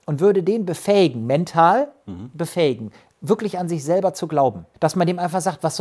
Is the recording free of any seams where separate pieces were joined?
no; 1 cut; at 4.7 s

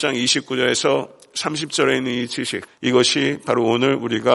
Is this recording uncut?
no; 1 cut; at 2.7 s

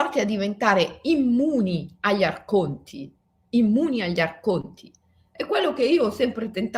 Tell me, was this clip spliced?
no; 0 cuts

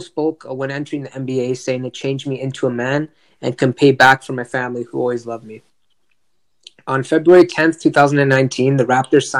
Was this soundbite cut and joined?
no; 0 cuts

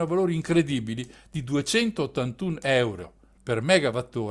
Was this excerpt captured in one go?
yes; 0 cuts

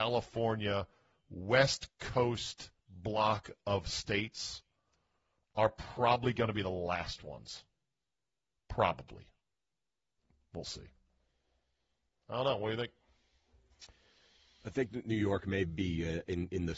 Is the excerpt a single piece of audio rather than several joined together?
yes; 0 cuts

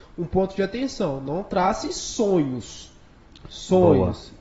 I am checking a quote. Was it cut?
no; 0 cuts

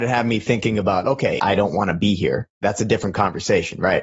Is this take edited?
yes; 2 cuts; at 1.4 s, 2.5 s

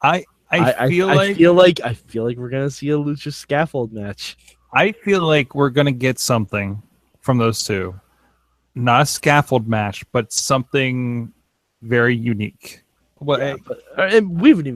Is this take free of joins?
no; 1 cut; at 13.2 s

